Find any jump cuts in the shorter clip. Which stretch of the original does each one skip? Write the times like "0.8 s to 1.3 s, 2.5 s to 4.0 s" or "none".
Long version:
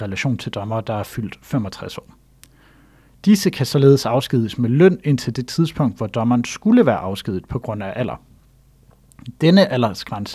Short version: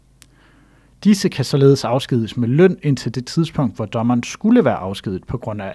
none